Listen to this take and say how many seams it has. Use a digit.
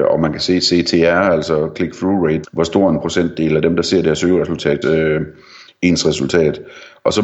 2